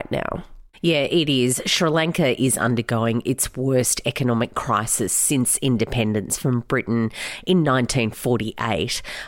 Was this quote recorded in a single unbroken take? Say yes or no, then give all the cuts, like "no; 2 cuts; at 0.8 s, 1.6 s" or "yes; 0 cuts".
yes; 0 cuts